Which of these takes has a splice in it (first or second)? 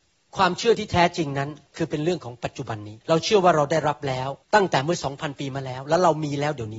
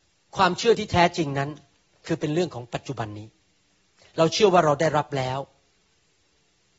first